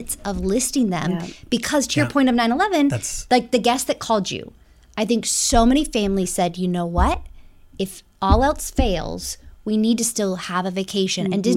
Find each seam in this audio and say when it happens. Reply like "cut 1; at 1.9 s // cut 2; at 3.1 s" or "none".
none